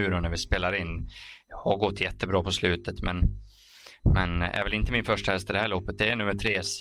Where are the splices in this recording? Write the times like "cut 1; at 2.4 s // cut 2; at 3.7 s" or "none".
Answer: none